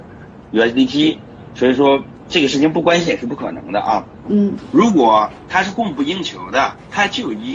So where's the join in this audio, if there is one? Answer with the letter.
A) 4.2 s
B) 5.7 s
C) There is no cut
A